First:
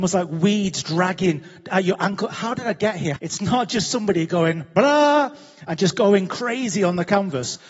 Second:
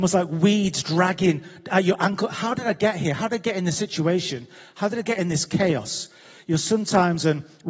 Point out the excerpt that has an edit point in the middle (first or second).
first